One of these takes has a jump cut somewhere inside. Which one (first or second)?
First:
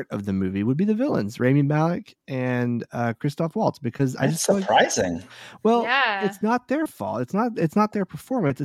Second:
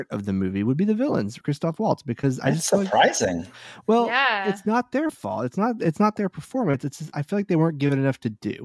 second